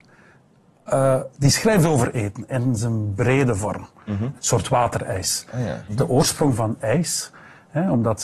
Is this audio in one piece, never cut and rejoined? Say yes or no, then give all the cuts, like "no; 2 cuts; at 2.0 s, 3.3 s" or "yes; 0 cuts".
no; 2 cuts; at 4.4 s, 5.9 s